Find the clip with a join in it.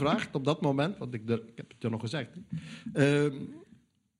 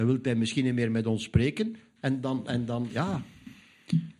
second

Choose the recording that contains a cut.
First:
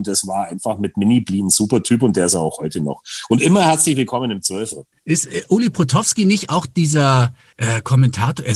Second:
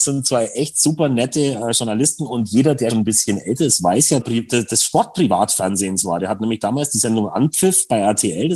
second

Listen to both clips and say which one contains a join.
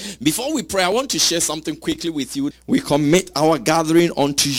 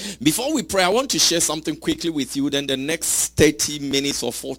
first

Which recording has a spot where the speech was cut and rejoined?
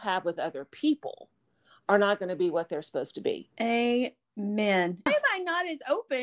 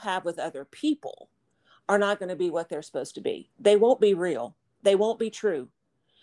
first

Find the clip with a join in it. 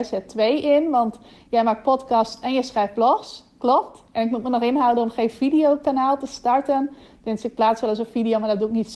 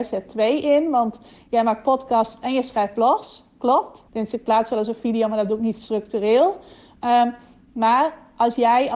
second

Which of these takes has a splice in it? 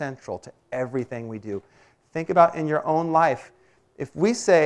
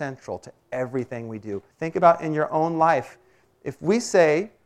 second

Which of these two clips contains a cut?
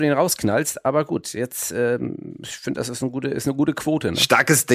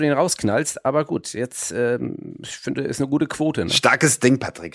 second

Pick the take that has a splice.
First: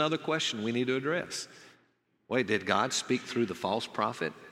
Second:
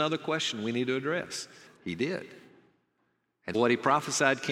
second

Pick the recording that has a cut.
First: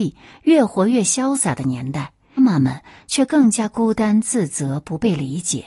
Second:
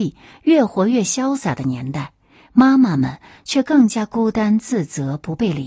first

